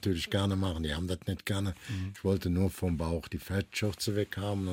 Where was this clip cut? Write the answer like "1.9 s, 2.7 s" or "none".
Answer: none